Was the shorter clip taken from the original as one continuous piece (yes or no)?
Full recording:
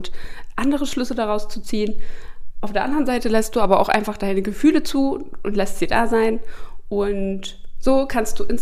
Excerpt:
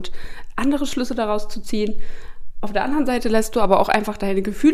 yes